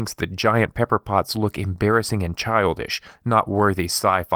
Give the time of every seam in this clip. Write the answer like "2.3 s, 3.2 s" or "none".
none